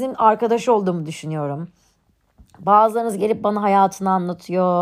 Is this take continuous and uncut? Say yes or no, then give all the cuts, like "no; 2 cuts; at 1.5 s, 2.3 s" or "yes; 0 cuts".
yes; 0 cuts